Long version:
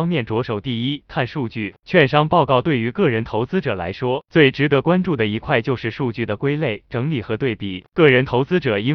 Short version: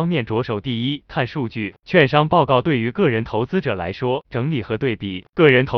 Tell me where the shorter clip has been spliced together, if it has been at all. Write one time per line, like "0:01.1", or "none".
0:04.2